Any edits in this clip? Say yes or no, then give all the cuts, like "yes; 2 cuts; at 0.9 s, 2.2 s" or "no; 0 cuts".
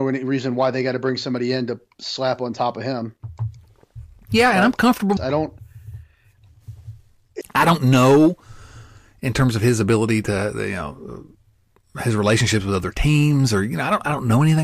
yes; 2 cuts; at 5.2 s, 7.4 s